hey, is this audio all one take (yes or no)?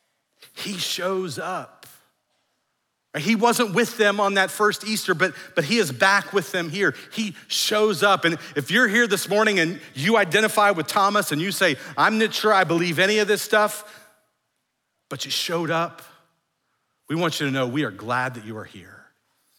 yes